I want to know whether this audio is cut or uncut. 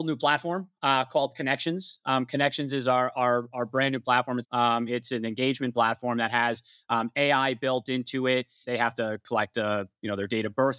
cut